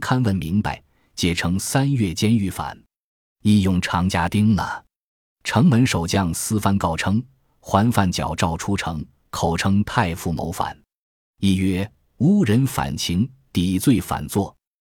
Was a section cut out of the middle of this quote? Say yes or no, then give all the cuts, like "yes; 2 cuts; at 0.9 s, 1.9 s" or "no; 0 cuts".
no; 0 cuts